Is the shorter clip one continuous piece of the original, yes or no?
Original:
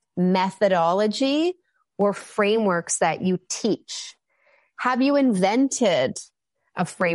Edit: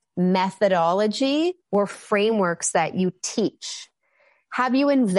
no